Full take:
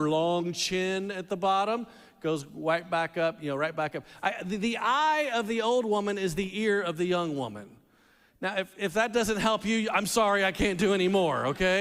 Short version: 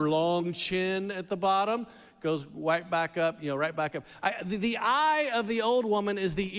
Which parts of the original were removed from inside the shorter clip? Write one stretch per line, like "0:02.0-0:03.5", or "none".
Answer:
none